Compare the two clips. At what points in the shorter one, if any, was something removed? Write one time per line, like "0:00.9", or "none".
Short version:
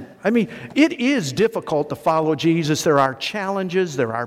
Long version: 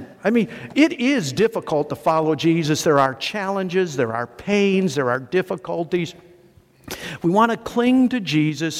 none